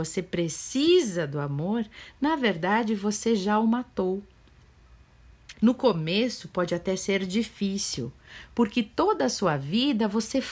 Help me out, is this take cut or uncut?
cut